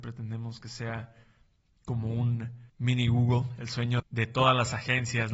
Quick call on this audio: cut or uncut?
cut